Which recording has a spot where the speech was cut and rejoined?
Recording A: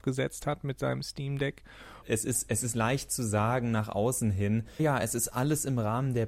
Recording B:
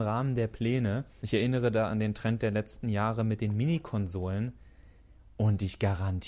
A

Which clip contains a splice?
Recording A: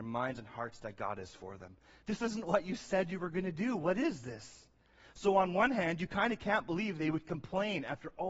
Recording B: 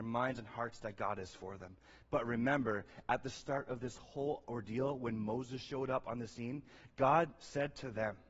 A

